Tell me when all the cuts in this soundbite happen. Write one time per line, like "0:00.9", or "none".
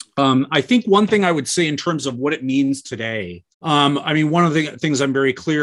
0:03.5